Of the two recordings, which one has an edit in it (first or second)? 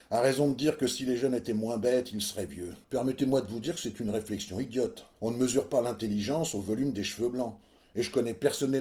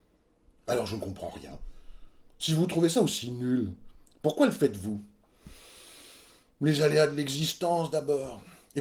first